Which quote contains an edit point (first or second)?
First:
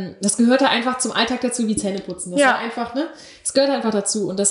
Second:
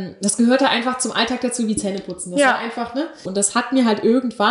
second